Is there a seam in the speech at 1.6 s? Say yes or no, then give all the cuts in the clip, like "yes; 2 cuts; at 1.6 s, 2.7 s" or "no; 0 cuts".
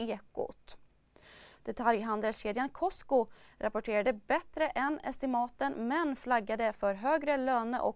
yes; 1 cut; at 1.6 s